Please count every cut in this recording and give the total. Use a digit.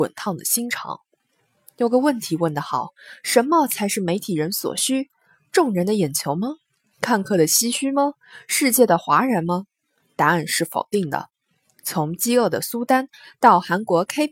0